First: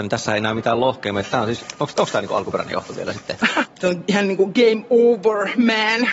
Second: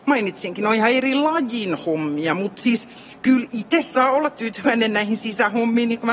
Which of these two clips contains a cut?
first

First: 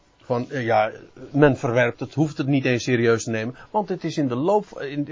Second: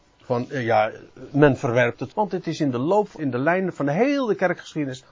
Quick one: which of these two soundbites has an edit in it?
second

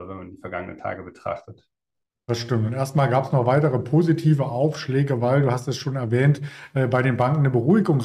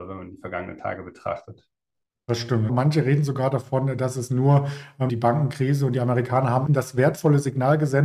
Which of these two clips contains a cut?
second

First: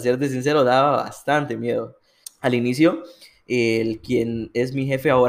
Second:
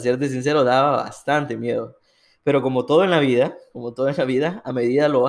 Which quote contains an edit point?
first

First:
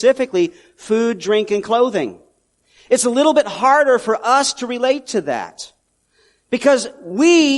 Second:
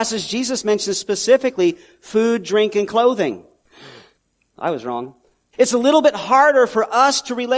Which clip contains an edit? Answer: second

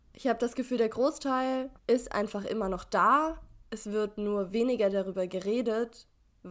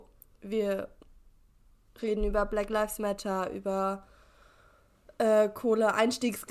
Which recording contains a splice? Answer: first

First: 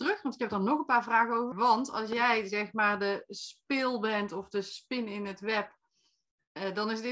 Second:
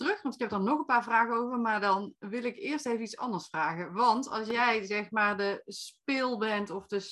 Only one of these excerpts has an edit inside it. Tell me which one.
first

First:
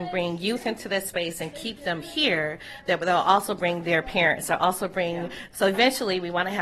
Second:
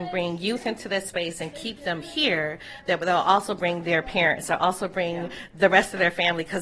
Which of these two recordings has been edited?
first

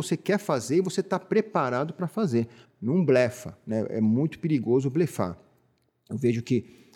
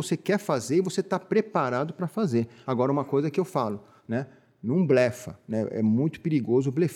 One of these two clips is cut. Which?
first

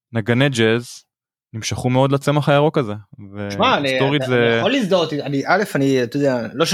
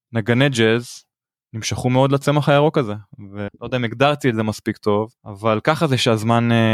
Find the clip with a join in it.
second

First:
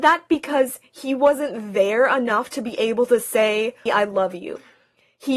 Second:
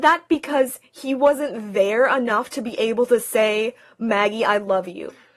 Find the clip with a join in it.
first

